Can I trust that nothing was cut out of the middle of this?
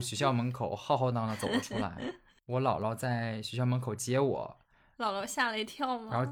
no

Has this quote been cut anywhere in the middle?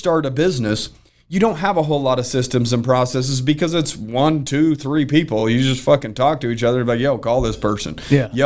no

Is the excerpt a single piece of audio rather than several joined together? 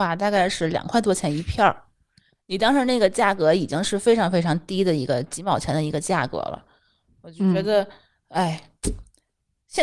yes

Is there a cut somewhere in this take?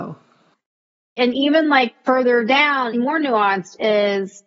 yes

